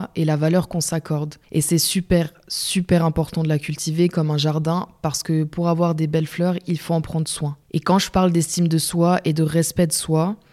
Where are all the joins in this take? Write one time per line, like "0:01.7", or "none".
0:01.4
0:07.6